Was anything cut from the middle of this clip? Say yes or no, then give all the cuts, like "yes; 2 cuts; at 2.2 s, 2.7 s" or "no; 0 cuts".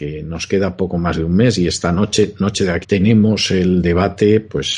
yes; 1 cut; at 2.8 s